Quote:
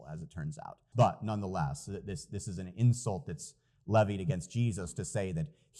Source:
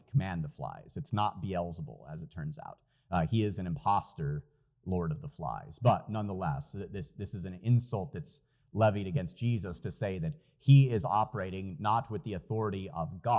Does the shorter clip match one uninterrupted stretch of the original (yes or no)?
no